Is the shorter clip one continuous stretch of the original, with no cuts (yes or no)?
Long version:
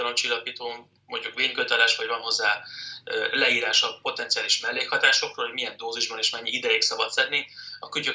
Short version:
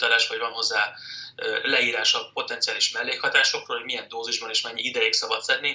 yes